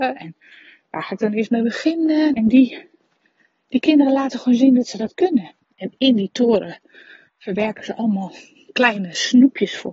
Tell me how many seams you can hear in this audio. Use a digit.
2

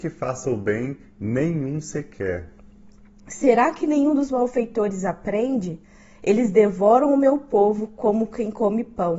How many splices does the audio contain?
0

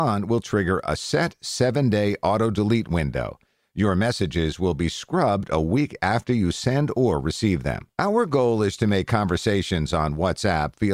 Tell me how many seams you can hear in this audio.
1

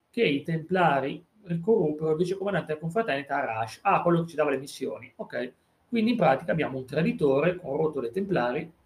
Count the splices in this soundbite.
0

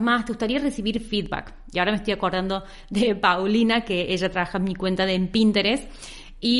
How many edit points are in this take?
0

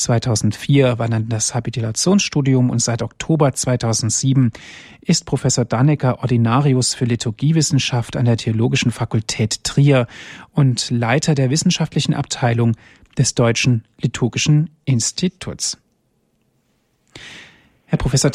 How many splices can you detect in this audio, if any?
0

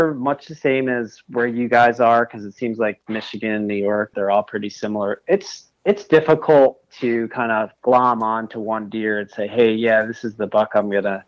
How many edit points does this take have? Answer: 2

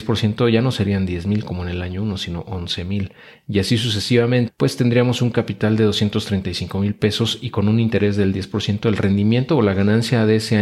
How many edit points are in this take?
1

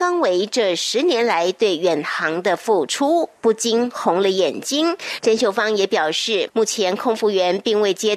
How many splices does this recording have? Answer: 1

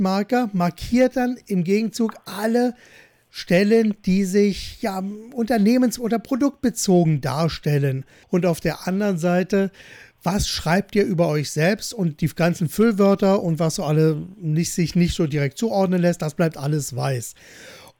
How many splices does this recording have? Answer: 1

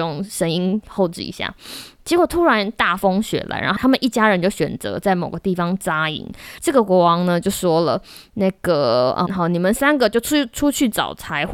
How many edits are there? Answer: 2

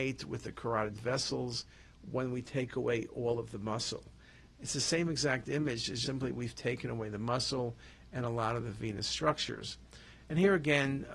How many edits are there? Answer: 1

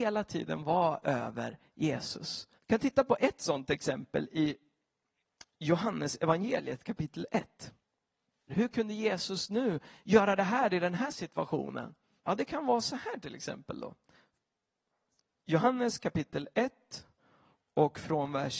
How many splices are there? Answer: 3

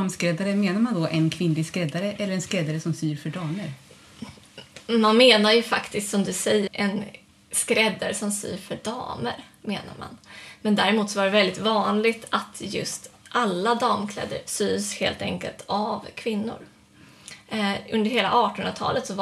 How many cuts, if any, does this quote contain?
1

